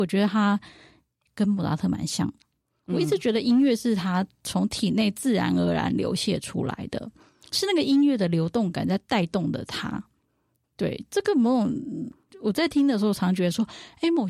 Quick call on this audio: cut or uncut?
uncut